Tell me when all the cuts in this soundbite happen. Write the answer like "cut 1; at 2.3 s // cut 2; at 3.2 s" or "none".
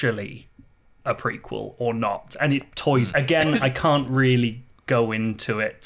cut 1; at 3.1 s